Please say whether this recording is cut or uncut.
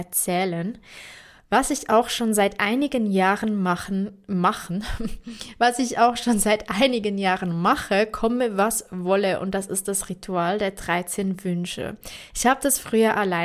cut